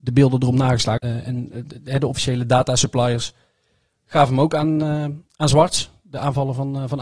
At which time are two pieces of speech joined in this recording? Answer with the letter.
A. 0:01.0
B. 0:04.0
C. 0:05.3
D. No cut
A